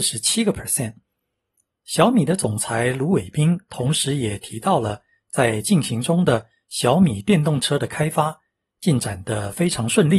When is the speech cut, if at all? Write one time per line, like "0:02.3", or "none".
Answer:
none